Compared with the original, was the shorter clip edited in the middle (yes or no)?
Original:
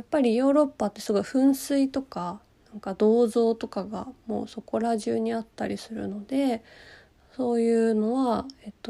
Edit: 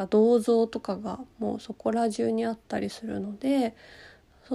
no